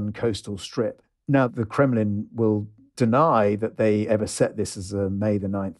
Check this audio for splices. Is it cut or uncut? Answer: uncut